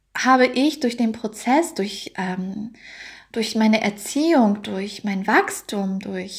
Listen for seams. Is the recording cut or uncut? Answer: uncut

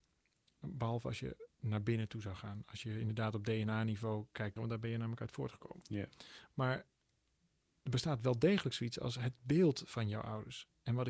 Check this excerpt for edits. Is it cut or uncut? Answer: cut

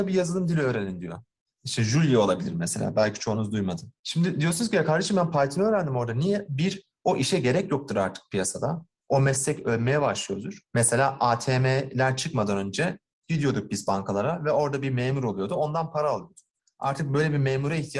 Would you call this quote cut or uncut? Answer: cut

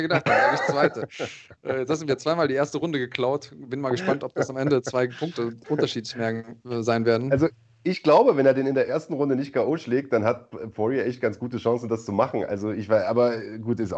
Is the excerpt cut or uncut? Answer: uncut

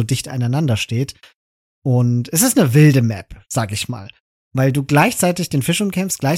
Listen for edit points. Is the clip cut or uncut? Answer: uncut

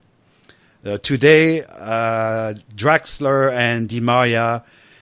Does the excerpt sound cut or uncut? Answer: uncut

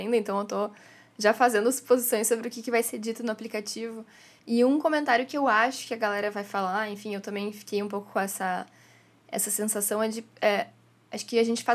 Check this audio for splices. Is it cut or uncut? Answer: uncut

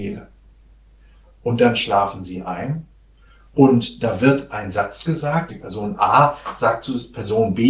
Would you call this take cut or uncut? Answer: cut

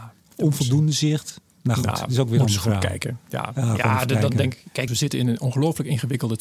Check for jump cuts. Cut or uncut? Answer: cut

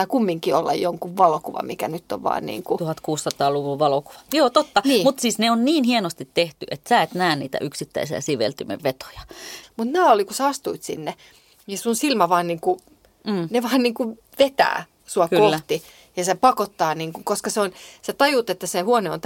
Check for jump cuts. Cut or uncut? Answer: cut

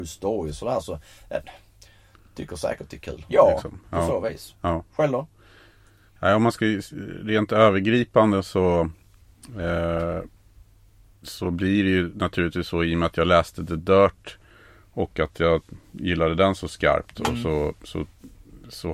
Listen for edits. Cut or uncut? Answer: cut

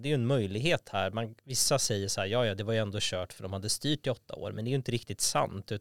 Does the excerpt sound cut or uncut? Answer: uncut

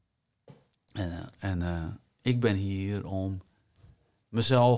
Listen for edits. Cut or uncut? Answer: uncut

